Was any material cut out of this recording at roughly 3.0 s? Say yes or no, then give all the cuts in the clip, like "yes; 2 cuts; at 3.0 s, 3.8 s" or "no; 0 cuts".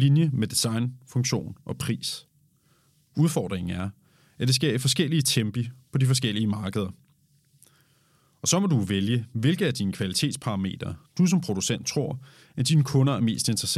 no; 0 cuts